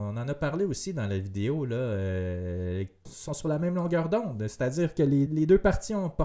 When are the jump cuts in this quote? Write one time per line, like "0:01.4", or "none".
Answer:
0:03.1
0:05.3